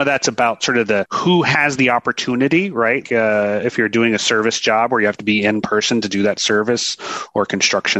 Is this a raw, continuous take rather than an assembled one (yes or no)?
no